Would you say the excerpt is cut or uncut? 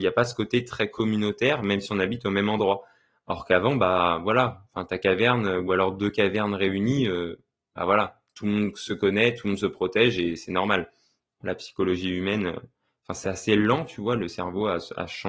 cut